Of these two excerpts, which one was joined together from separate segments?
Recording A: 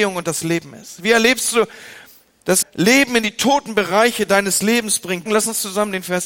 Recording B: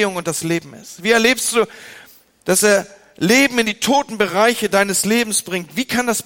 A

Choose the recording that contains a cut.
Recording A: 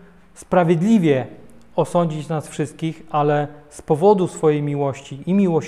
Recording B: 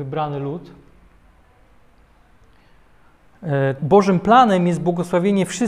B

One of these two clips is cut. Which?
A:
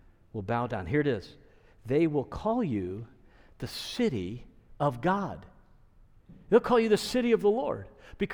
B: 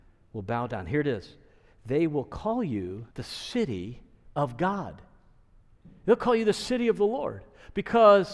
B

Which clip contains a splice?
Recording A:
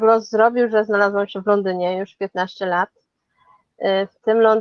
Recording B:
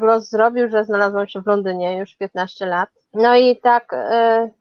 B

